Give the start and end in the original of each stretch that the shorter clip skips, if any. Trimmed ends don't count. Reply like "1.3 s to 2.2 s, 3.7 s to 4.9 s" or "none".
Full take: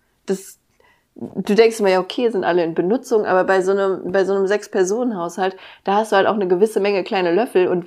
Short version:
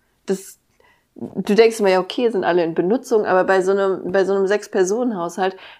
none